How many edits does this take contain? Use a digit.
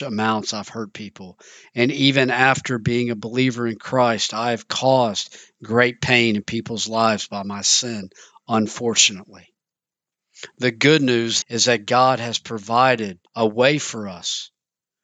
2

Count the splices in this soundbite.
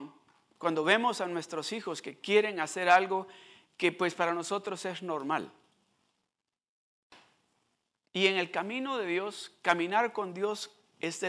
0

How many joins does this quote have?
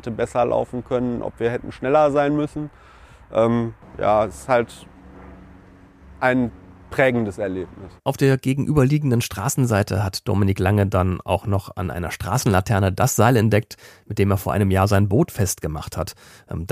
1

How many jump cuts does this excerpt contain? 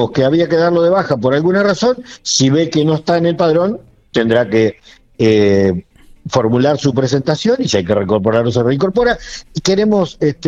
0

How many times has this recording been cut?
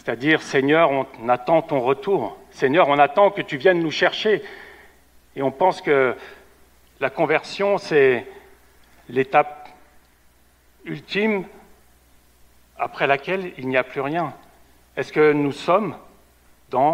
0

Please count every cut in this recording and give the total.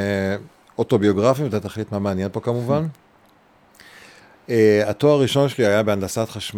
0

